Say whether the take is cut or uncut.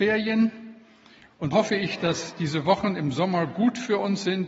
cut